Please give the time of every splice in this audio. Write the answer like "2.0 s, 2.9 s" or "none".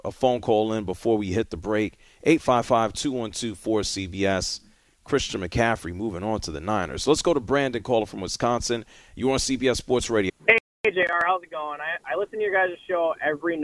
10.3 s